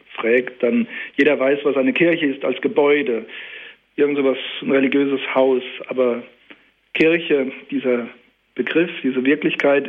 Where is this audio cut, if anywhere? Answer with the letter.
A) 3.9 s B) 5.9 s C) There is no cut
C